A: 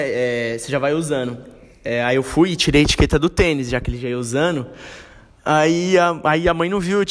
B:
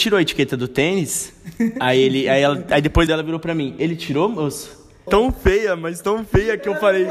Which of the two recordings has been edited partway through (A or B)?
B